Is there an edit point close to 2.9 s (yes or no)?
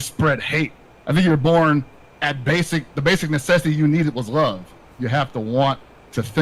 yes